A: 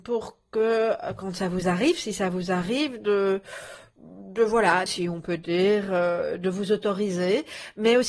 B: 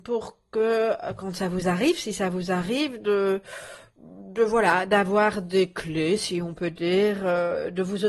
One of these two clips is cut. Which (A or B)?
A